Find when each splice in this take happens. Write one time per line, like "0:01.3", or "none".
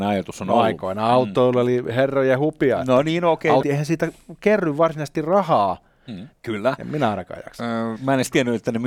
0:03.6
0:06.3
0:08.0